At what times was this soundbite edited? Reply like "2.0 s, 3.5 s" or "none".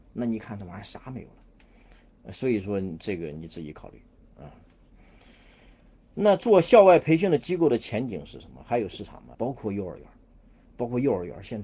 9.3 s

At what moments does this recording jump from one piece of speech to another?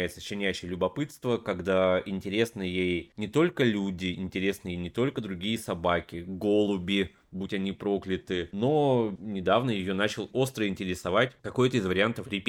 10.3 s

